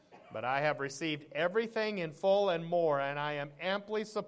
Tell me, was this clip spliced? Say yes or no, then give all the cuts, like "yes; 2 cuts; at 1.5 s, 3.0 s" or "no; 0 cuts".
no; 0 cuts